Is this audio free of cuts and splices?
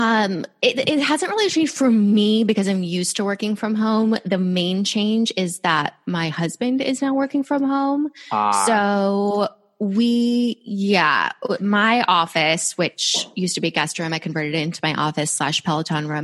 yes; 0 cuts

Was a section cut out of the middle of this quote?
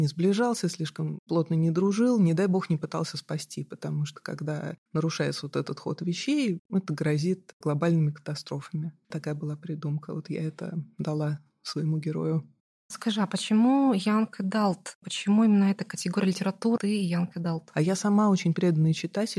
yes; 1 cut; at 16.8 s

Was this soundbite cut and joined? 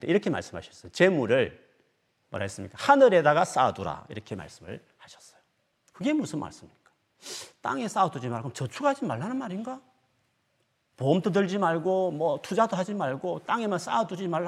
yes; 1 cut; at 2.2 s

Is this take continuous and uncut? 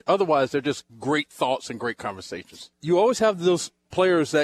no; 1 cut; at 2.7 s

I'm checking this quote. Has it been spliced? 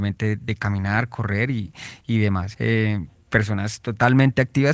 yes; 1 cut; at 2.5 s

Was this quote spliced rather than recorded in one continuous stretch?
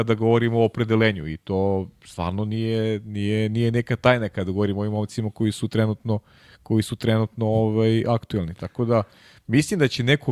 no; 0 cuts

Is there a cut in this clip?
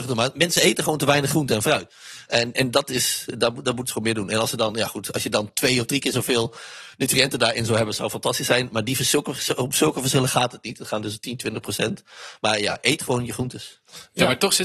no; 0 cuts

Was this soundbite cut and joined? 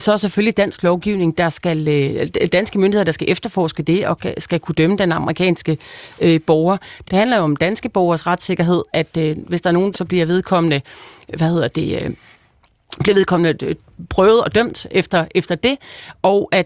yes; 2 cuts; at 7.0 s, 9.9 s

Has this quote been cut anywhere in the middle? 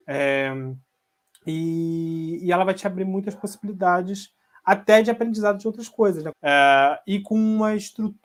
yes; 1 cut; at 6.3 s

